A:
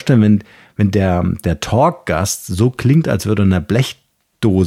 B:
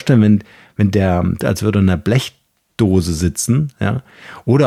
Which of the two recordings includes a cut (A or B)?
B